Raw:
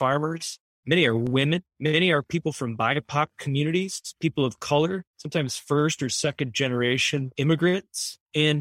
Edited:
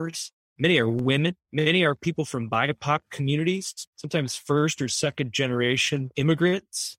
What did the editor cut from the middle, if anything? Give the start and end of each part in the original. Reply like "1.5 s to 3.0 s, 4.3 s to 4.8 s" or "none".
4.1 s to 5.1 s